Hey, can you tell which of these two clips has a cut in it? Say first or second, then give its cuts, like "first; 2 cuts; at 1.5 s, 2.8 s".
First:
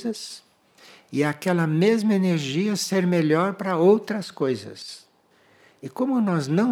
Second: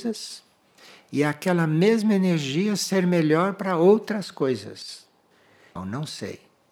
second; 1 cut; at 5.8 s